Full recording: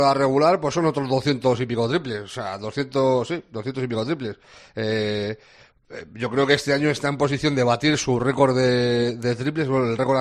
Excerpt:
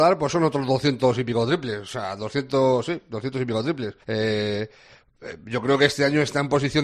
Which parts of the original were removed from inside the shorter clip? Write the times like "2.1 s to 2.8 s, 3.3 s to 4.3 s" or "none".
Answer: 4.4 s to 4.7 s